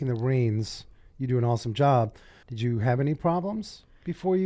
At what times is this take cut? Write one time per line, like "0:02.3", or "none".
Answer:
0:02.4